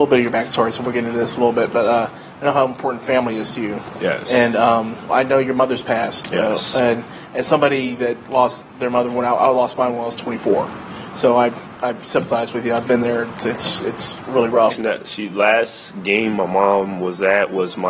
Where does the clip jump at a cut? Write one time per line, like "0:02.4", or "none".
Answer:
0:05.1
0:14.7